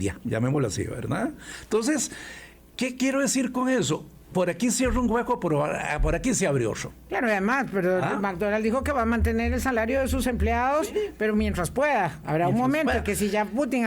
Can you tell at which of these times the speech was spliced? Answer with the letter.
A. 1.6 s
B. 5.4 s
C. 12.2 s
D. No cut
D